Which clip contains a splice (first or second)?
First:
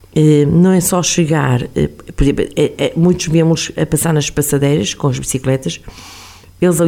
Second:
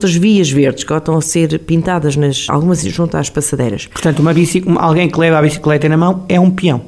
second